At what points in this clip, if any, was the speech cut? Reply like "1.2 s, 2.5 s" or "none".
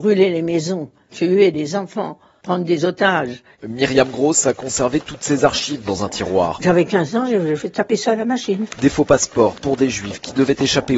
3.5 s